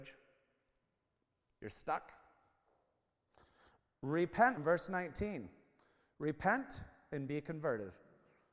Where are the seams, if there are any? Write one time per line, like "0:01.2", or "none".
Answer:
0:04.6